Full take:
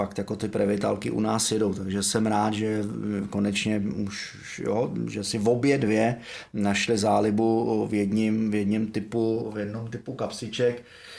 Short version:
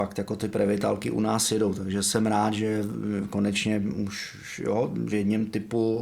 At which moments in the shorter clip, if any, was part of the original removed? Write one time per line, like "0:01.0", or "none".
0:05.1